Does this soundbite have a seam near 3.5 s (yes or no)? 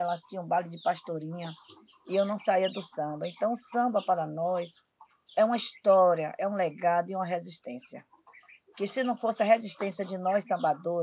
no